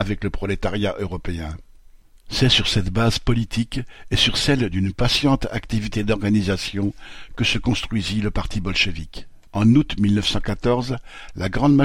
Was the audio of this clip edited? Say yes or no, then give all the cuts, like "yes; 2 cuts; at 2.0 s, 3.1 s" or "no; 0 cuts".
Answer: yes; 1 cut; at 9.5 s